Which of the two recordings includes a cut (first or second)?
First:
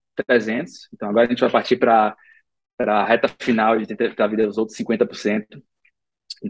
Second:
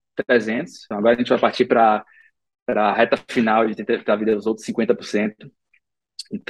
second